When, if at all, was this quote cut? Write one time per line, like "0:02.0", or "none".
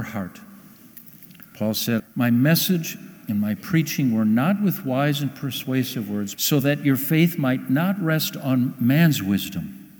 0:02.0
0:06.3